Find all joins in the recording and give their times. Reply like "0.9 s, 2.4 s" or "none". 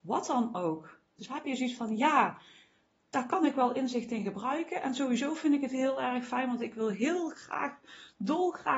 1.2 s